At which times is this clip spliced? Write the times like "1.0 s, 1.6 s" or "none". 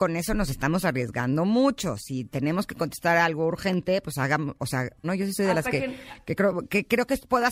5.0 s